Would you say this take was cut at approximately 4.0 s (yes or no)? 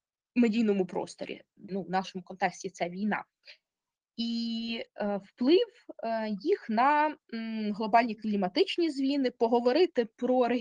no